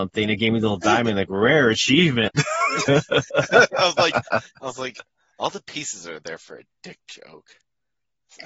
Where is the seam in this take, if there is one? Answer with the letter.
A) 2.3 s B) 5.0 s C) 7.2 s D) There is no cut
A